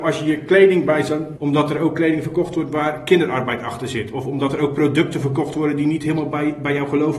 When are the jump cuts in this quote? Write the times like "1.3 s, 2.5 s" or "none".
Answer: 1.4 s